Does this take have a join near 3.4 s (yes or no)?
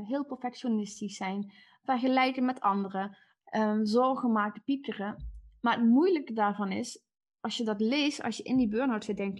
yes